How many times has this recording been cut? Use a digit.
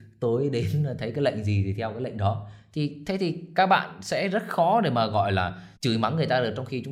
1